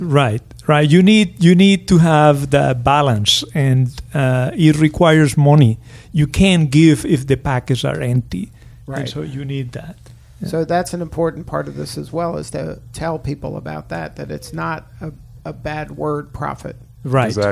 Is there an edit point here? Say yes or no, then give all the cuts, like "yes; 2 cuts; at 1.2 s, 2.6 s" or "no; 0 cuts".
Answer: no; 0 cuts